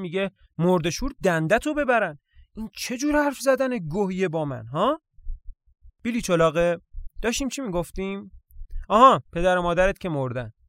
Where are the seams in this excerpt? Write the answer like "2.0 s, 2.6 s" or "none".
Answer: 9.3 s